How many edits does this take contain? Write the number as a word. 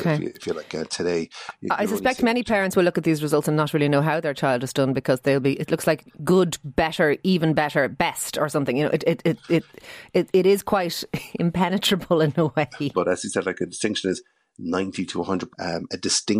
three